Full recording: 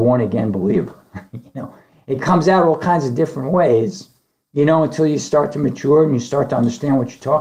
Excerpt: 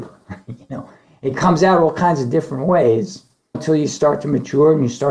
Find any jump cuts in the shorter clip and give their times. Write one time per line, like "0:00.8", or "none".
0:03.5